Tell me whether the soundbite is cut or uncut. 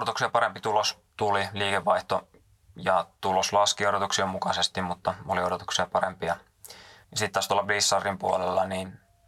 cut